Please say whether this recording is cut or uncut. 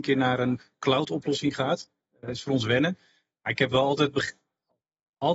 uncut